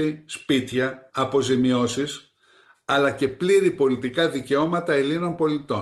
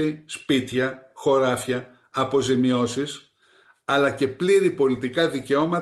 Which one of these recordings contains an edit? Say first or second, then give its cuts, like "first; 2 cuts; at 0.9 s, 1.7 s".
first; 1 cut; at 1.1 s